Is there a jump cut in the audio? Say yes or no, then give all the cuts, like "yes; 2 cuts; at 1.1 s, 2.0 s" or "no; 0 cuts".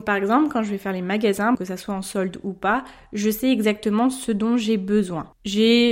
yes; 1 cut; at 1.5 s